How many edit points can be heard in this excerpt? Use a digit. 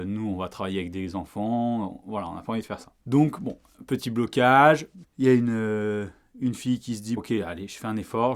3